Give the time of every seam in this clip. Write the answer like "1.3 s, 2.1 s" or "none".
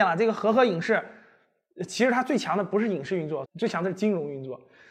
3.4 s

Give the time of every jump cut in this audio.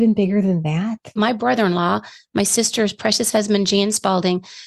1.2 s

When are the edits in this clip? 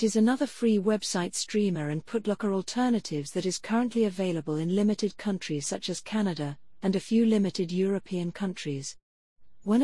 6.8 s

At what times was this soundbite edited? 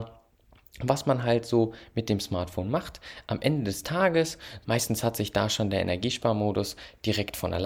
4.6 s

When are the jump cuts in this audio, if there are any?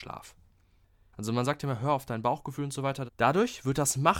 1.1 s, 3.1 s

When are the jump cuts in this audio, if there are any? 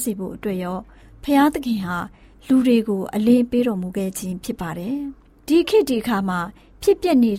none

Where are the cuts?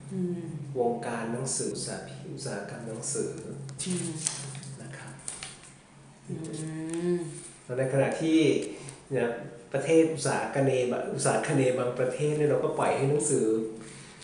1.7 s

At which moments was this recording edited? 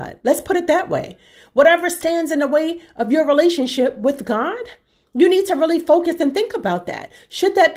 none

